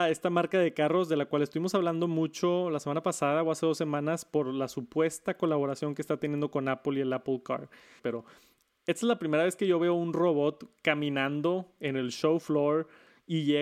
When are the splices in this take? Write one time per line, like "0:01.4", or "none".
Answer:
0:08.0

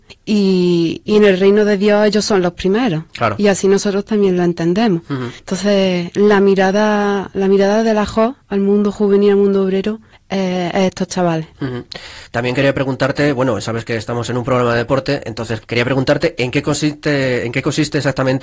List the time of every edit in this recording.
0:15.6

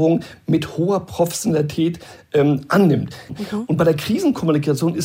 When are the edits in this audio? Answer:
0:03.3

